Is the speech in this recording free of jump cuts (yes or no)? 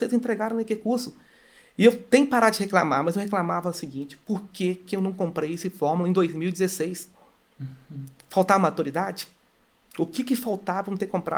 yes